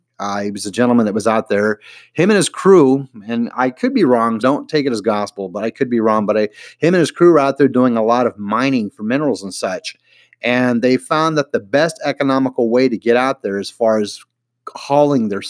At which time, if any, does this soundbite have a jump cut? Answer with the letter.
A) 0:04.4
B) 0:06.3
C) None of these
A